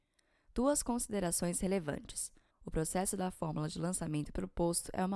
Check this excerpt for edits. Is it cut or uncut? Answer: cut